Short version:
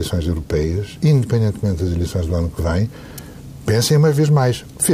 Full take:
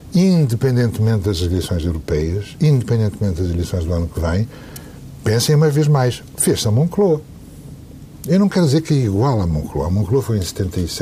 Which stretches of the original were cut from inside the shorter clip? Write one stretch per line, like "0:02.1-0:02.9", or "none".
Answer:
none